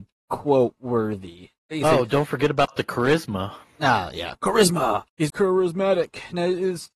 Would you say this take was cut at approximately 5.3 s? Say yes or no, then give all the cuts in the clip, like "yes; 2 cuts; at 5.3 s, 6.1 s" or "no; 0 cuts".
yes; 1 cut; at 5.3 s